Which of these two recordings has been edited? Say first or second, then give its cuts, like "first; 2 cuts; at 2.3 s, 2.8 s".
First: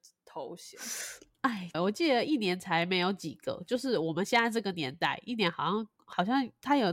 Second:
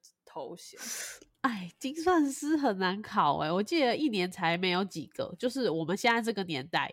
first; 1 cut; at 1.7 s